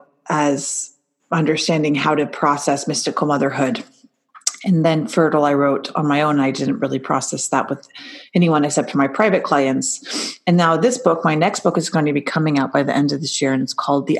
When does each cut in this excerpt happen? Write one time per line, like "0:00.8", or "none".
none